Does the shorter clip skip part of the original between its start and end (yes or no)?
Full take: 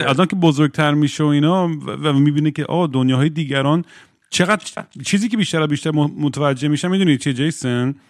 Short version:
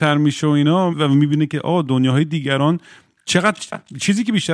yes